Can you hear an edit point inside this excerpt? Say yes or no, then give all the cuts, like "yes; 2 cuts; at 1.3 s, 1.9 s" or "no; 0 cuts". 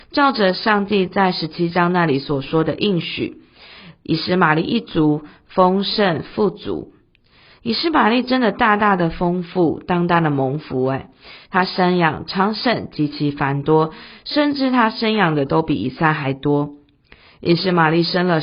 no; 0 cuts